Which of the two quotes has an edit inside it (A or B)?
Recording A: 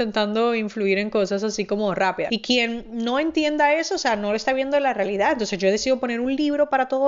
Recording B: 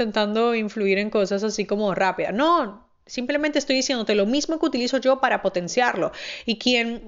A